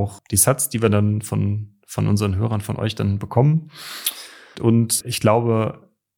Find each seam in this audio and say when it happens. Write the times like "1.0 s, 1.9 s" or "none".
4.5 s

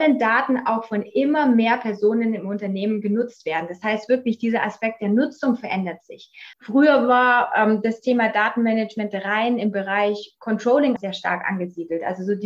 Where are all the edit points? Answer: 6.5 s, 11.0 s

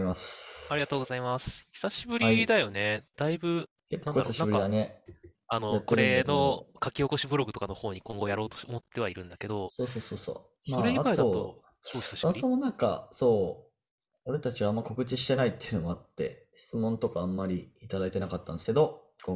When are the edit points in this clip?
5.3 s

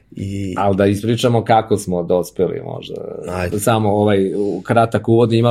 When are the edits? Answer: 3.5 s

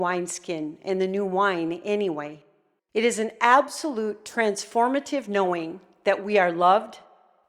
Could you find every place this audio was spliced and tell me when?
2.8 s

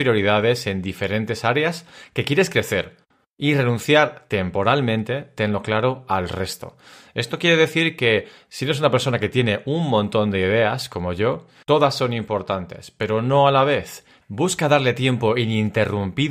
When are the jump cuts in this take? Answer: 11.6 s, 14.2 s

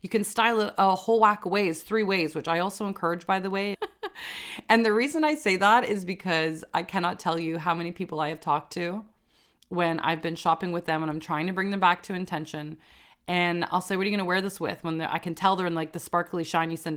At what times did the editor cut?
3.7 s

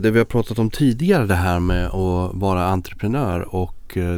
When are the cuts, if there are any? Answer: none

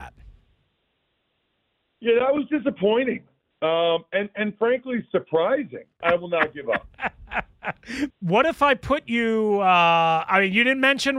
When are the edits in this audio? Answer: 6.0 s, 8.1 s

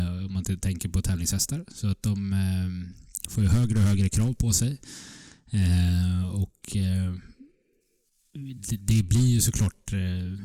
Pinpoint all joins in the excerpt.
none

